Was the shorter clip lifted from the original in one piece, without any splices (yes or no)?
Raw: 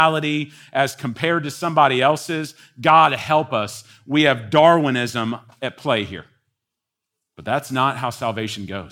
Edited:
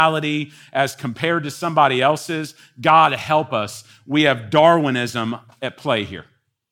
yes